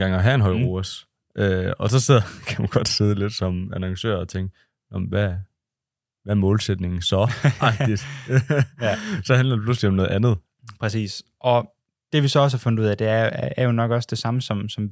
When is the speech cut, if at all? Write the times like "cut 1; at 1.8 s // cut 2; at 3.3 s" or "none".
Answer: none